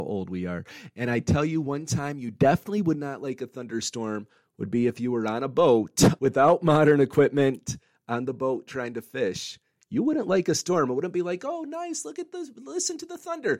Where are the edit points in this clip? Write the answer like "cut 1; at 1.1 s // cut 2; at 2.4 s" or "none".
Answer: cut 1; at 6.2 s